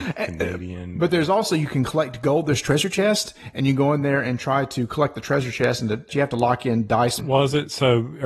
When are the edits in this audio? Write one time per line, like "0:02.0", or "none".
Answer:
0:06.1
0:07.2